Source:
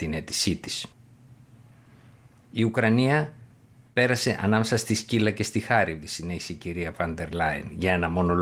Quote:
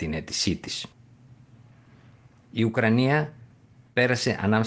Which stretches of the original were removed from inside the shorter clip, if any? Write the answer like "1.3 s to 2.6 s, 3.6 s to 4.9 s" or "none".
none

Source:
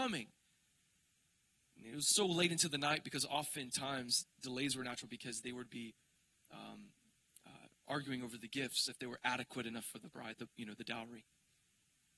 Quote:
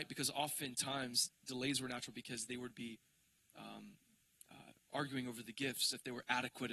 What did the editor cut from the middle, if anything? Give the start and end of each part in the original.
none

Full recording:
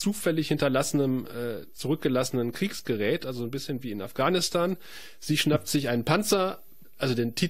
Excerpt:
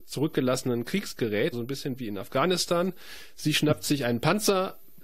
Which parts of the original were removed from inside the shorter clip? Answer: 3.2 s to 3.4 s

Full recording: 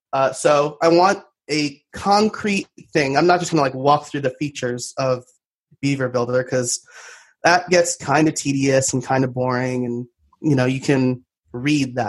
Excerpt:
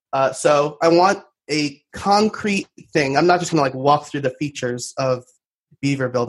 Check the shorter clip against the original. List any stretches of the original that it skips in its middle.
none

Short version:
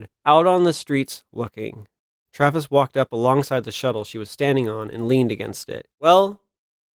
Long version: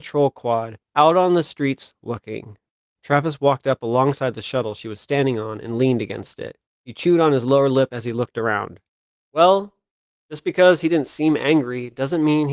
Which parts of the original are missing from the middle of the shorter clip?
6.6 s to 9.2 s

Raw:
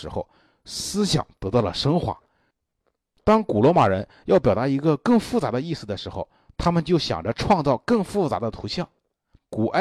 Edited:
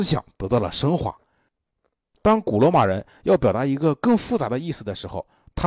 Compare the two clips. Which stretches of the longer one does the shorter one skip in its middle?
none

